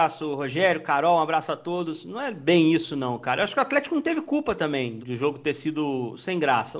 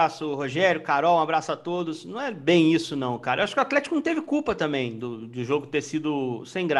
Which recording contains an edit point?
first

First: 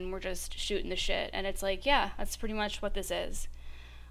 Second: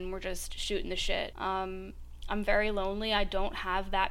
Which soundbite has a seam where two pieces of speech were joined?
second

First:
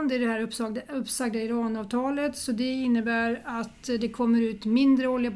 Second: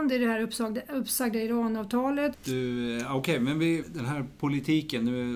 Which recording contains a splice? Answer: second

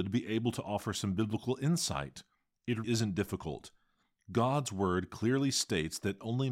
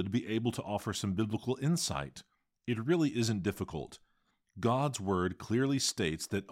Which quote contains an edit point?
first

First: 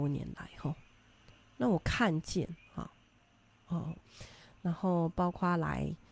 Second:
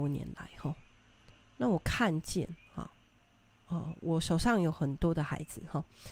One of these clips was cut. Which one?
first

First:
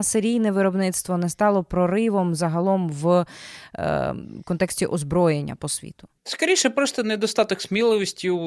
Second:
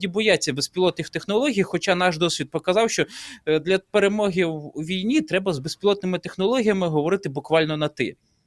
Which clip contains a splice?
first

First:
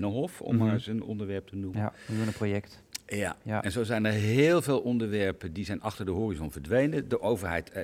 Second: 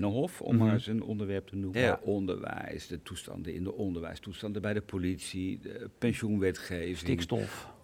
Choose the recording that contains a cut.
second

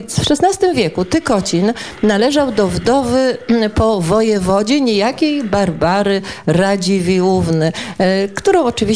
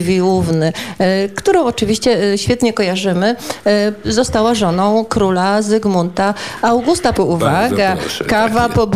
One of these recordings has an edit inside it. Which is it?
second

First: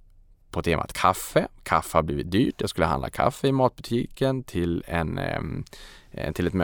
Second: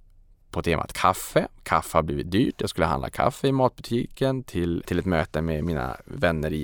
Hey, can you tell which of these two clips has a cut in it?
second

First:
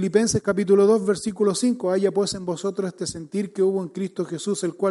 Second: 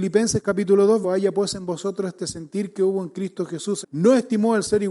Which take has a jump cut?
second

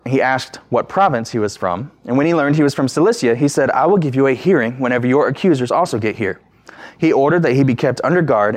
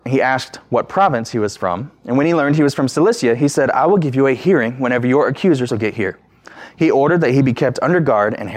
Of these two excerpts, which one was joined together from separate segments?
second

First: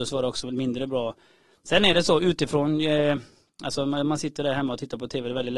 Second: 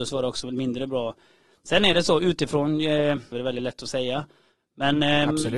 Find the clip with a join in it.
second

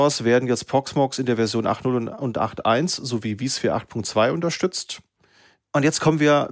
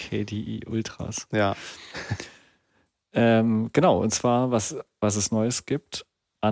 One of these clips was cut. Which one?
first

